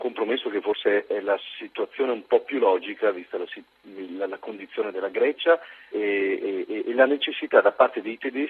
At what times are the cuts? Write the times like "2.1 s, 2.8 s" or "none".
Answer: 5.9 s